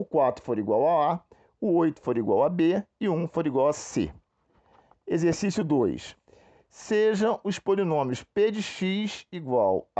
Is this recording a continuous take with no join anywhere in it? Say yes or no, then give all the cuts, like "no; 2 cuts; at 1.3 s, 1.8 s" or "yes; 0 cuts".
yes; 0 cuts